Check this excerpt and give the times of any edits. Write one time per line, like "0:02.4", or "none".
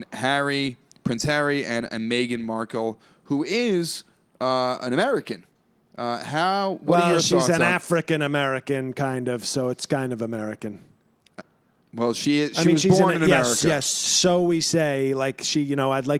none